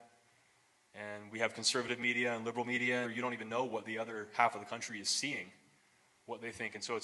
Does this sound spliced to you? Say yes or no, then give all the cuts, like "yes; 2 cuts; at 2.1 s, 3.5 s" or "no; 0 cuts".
yes; 1 cut; at 3.0 s